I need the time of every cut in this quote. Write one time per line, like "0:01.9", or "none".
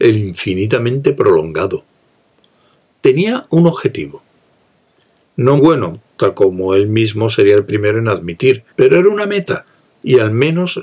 0:05.6
0:08.7